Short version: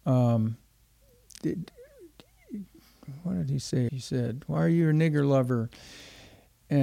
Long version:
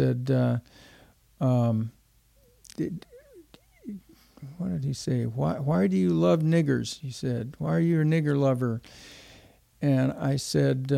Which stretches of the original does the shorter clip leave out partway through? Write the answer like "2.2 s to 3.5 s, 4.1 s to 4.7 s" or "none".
5.2 s to 7.0 s